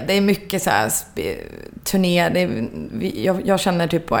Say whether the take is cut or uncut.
uncut